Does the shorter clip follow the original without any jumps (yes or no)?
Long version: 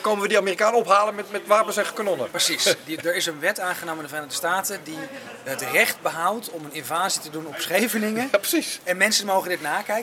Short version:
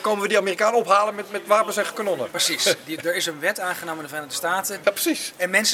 no